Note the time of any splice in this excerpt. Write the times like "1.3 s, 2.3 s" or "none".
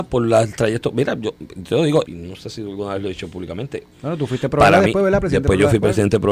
2.0 s, 3.9 s

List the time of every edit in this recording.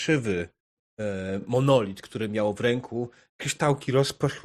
none

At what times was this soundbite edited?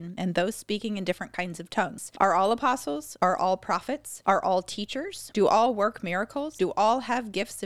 none

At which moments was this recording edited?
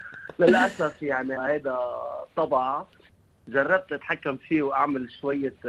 1.4 s

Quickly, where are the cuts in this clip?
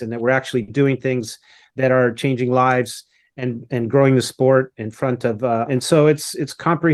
5.7 s

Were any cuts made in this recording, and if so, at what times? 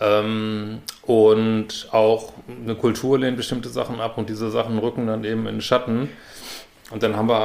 none

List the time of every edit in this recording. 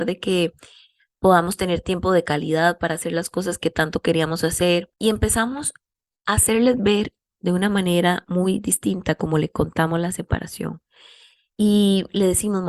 4.9 s

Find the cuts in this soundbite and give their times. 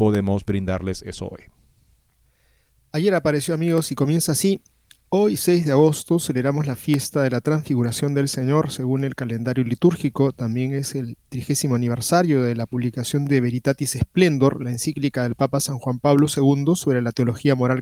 none

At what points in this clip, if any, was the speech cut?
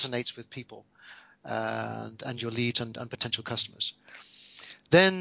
none

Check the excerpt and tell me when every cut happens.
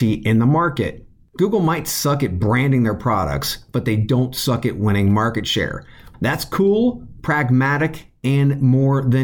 6.1 s

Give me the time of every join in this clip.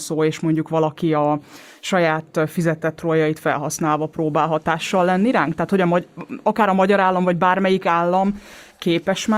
none

